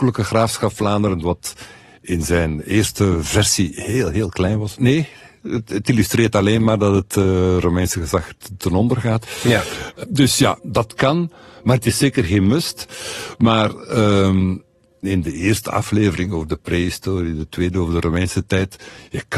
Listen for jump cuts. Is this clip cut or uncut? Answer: cut